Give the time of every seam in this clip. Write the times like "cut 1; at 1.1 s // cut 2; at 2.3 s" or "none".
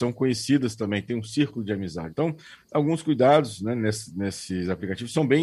cut 1; at 2.1 s

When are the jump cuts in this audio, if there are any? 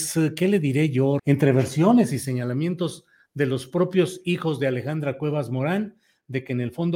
cut 1; at 1.2 s

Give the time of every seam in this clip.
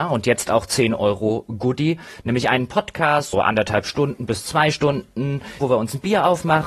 cut 1; at 3.3 s // cut 2; at 5.6 s

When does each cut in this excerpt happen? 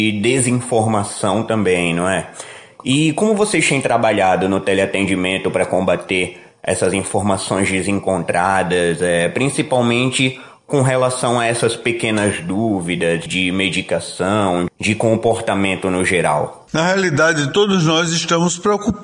cut 1; at 13.3 s // cut 2; at 14.7 s

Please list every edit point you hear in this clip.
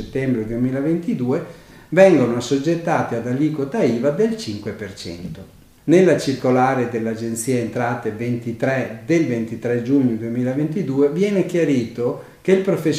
cut 1; at 5.8 s

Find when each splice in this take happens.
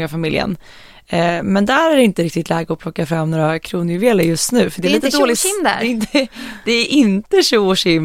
none

